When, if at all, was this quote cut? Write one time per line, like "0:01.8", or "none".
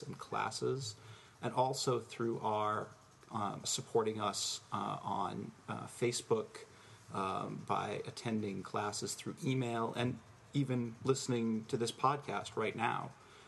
0:03.6